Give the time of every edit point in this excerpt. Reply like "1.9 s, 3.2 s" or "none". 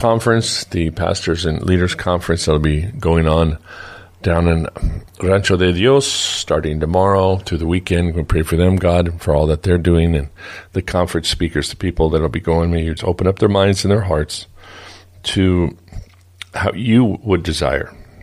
13.0 s